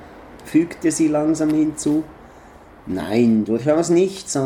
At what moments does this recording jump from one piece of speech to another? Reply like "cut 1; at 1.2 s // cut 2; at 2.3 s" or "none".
none